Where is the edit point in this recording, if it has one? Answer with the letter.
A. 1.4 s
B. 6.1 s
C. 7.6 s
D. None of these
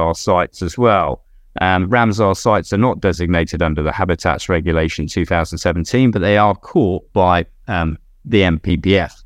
D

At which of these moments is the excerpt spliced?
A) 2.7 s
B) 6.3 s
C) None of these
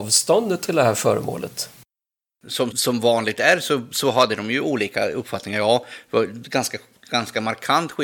A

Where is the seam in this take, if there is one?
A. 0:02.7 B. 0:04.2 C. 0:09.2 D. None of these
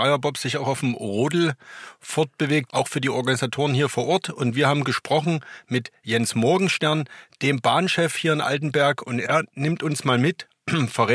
A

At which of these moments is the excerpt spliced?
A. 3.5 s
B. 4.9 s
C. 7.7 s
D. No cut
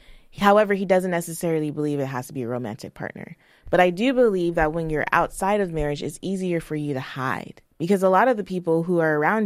C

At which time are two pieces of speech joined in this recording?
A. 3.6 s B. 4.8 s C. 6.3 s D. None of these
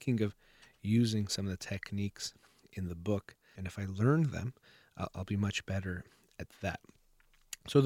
A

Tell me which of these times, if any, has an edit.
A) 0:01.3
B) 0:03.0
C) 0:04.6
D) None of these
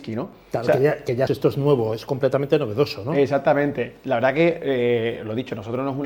A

